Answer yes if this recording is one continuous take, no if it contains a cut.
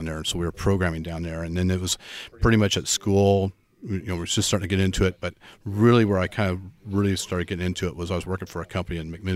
yes